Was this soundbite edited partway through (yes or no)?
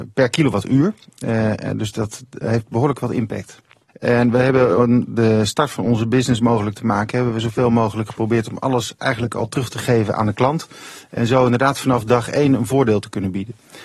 yes